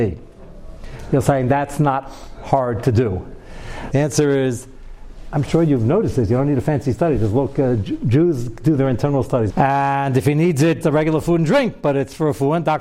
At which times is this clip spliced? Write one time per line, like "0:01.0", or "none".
0:03.9
0:09.5
0:10.8